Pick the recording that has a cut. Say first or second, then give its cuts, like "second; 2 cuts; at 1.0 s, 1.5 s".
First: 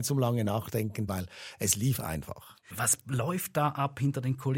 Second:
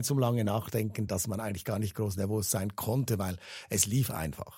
first; 2 cuts; at 1.1 s, 2.7 s